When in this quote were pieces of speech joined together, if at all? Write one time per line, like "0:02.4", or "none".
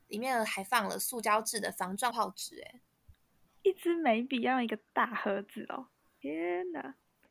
0:02.1

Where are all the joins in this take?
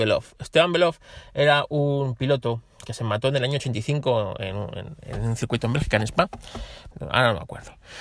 0:06.9

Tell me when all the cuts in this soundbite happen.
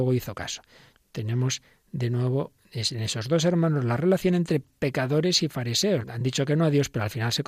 0:00.9
0:06.0

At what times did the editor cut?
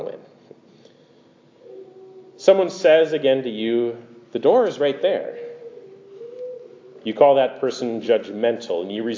none

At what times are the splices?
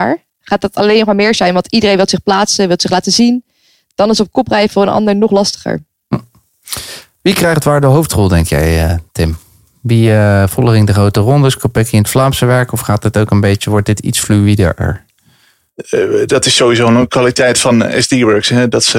0:09.1

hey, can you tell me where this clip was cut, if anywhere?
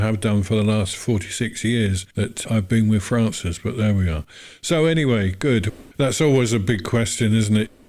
0:02.1
0:05.9

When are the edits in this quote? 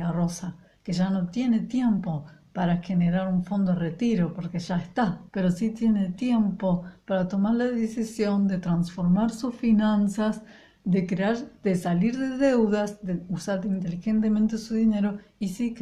0:05.3

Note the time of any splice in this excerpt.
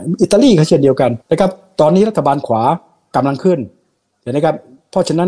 0:01.2

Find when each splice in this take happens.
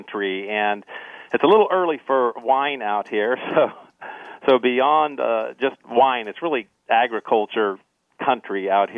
none

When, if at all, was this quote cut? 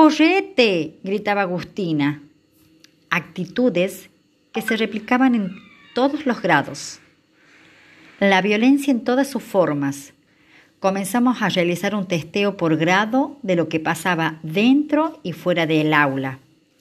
none

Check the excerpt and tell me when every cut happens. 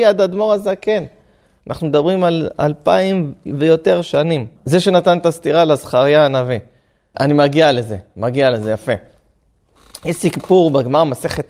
0:04.5
0:07.1

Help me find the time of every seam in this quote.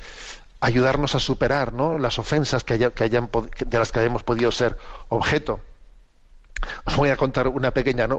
none

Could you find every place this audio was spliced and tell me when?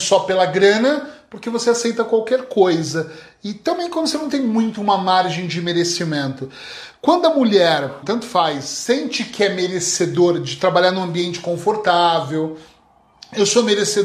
0:08.0

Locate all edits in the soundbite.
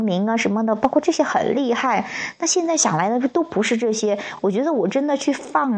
none

